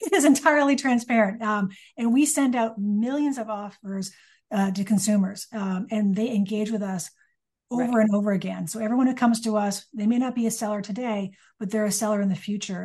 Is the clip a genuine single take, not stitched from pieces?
yes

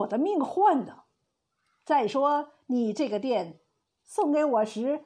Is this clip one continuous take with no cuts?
yes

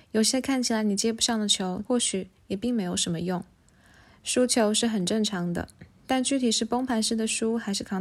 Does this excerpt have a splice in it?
yes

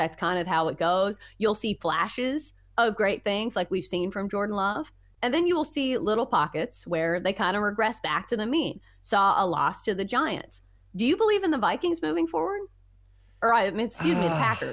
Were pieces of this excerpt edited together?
no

